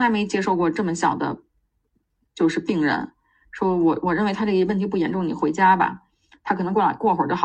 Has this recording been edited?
no; 0 cuts

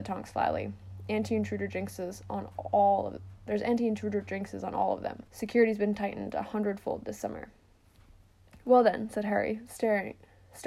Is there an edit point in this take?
yes; 1 cut; at 5.3 s

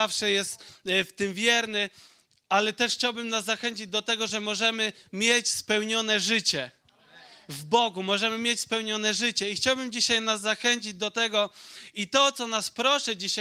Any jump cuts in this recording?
no; 0 cuts

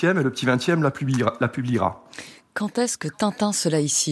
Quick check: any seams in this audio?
no; 0 cuts

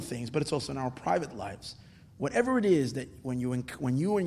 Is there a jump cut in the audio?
no; 0 cuts

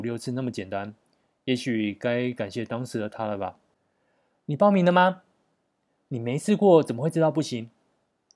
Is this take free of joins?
yes; 0 cuts

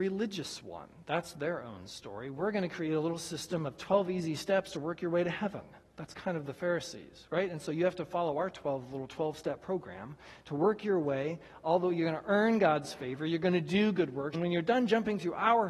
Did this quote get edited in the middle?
yes; 1 cut; at 14.3 s

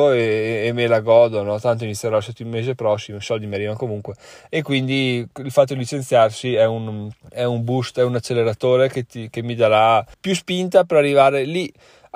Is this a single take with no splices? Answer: no; 2 cuts; at 7.2 s, 10.1 s

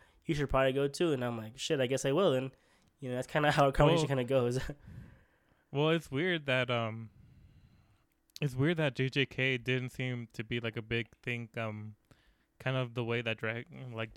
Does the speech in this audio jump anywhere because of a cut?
no; 0 cuts

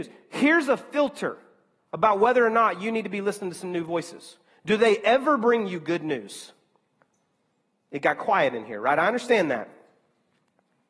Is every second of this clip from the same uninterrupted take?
yes; 0 cuts

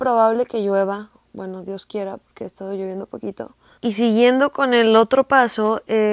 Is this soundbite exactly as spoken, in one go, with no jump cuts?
yes; 0 cuts

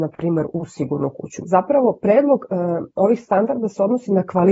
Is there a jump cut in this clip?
yes; 1 cut; at 1.4 s

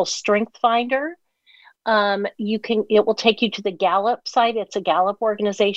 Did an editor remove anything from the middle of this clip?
no; 0 cuts

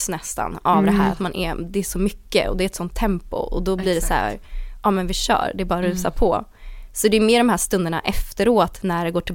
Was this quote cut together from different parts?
no; 0 cuts

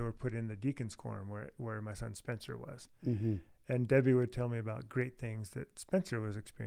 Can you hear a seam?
no; 0 cuts

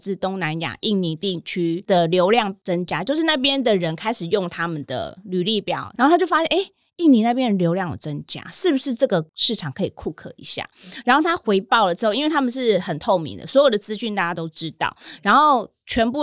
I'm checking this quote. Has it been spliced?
no; 0 cuts

